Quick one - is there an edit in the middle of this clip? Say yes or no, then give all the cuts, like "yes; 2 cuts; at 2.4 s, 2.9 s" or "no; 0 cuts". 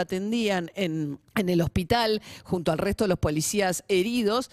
yes; 1 cut; at 1.3 s